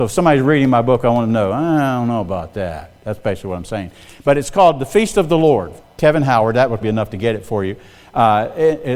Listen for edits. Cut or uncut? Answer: cut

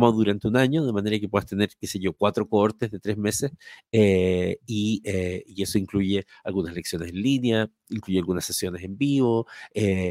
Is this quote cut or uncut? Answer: uncut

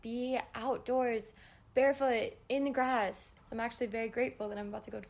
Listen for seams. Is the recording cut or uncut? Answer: cut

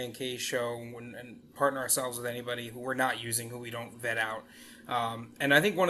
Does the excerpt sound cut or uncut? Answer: uncut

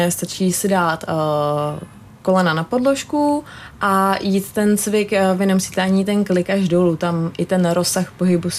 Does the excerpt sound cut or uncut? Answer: uncut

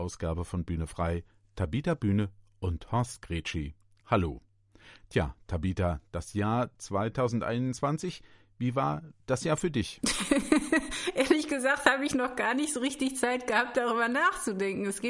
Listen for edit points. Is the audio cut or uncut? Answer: uncut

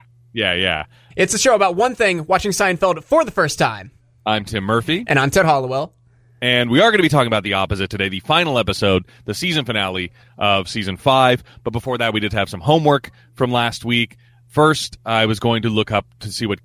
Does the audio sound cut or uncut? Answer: cut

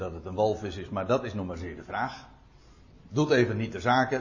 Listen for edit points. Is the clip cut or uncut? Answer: uncut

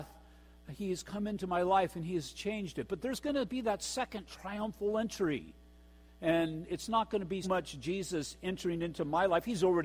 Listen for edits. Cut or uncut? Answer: cut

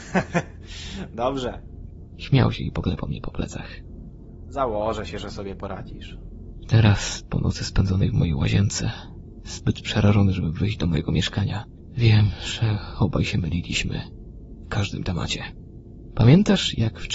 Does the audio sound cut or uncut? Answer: uncut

